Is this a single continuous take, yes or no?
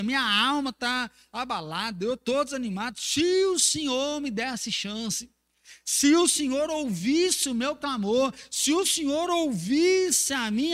yes